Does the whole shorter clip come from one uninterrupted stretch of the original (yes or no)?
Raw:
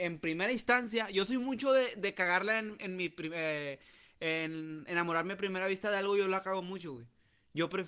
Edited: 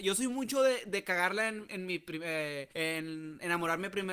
no